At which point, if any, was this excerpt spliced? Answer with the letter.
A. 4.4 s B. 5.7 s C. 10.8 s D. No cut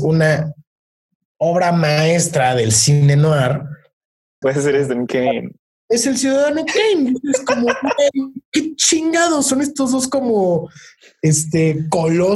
A